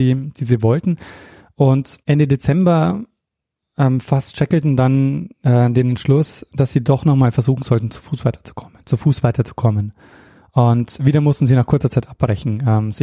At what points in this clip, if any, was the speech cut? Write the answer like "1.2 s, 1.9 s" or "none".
8.8 s